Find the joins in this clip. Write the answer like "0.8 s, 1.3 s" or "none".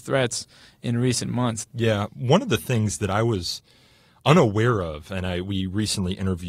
1.6 s